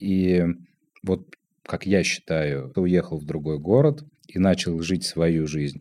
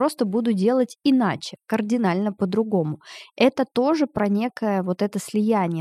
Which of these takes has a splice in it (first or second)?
first